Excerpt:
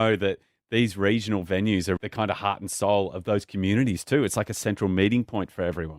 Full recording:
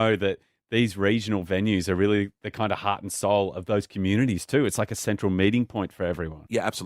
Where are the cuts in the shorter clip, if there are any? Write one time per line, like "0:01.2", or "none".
0:02.0